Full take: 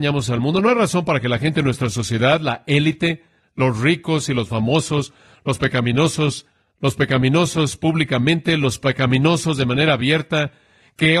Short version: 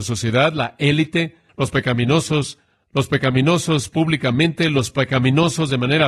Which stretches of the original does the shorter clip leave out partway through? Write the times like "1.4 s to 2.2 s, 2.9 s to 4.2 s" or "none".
3.4 s to 5.4 s